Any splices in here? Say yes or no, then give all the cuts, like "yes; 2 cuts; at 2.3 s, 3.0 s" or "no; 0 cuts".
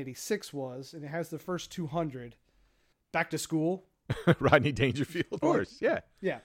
yes; 2 cuts; at 2.9 s, 5.4 s